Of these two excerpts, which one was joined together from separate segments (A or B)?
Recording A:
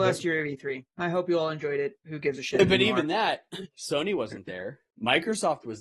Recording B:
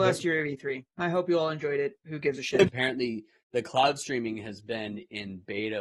B